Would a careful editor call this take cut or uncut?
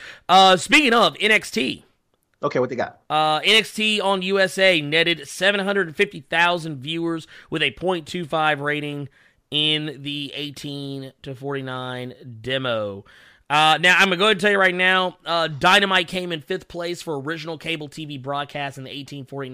uncut